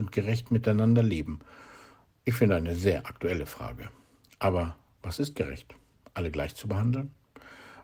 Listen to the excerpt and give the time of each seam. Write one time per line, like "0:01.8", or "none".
none